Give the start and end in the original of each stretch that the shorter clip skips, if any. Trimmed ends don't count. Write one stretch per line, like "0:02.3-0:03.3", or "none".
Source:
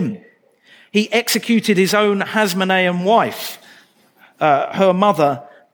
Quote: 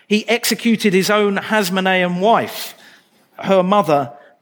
0:04.2-0:04.7